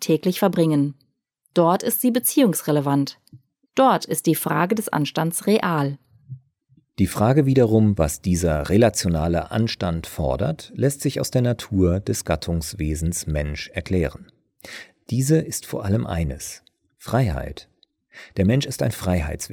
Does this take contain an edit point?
no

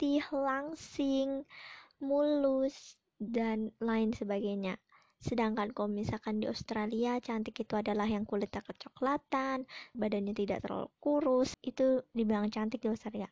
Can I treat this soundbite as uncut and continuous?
no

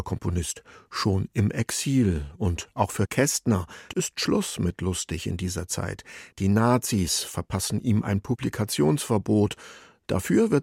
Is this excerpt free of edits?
no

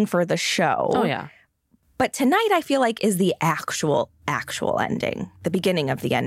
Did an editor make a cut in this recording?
no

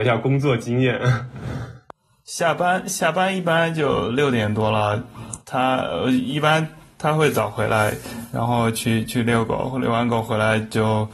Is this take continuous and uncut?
yes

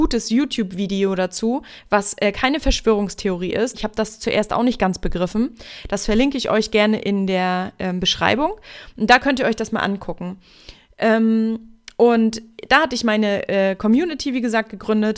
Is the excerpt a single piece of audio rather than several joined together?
no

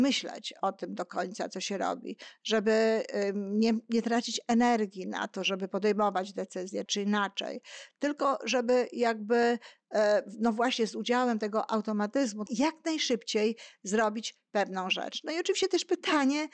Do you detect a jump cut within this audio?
yes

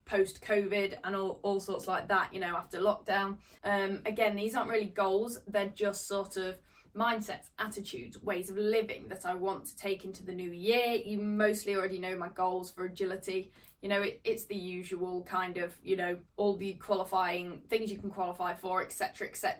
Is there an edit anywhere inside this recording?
yes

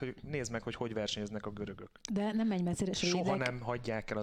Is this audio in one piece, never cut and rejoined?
yes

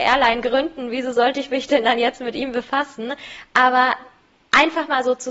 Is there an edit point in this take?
no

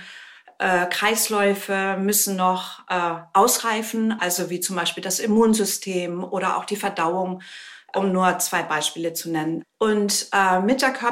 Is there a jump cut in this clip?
no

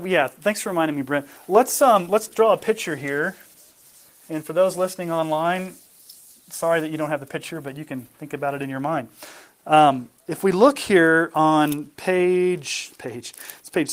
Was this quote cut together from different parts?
no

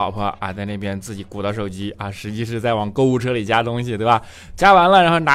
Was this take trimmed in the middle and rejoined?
no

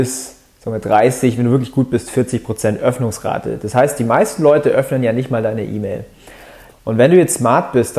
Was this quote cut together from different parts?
yes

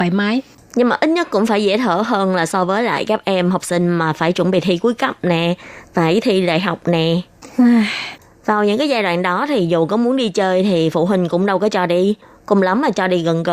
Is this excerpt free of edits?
yes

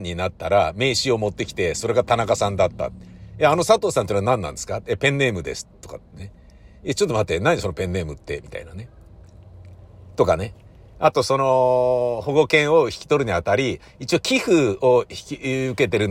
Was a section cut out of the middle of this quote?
no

